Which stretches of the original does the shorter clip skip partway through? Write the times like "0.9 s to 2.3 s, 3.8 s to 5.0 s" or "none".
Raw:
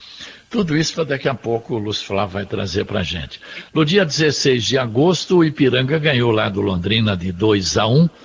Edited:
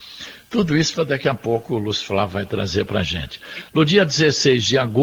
none